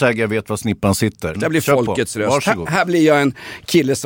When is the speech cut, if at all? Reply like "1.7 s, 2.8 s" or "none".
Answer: 1.3 s